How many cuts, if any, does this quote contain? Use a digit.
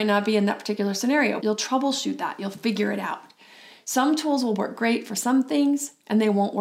1